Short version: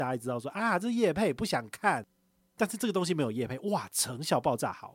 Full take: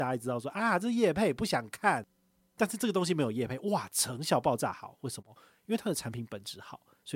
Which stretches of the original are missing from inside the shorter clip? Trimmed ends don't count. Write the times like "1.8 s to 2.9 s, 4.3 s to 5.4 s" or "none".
none